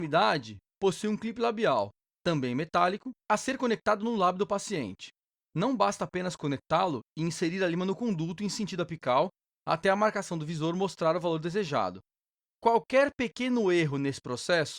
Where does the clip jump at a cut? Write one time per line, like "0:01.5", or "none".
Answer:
0:03.2
0:05.4

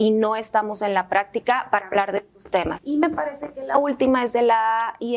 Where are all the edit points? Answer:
0:02.8

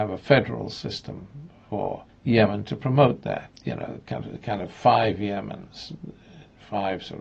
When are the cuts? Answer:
none

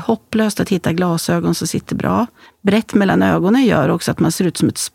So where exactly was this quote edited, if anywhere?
0:02.5

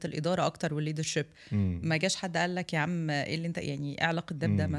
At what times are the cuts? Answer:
none

